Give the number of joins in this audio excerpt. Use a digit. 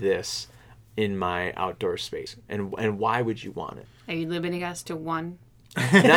0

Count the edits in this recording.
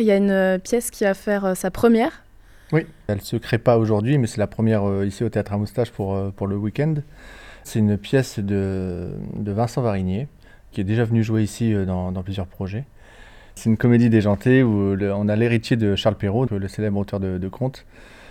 1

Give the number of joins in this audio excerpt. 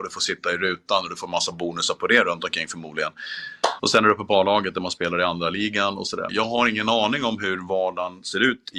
2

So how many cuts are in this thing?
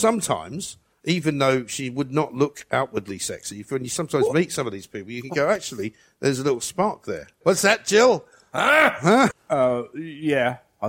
2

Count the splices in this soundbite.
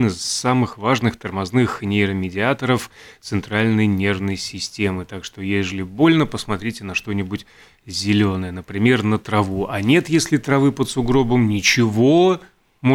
0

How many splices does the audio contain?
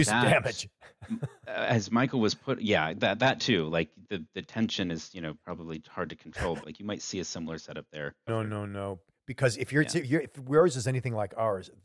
2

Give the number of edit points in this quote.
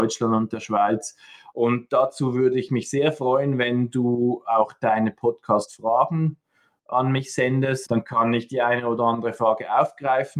2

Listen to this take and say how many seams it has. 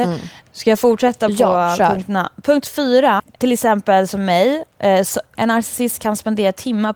2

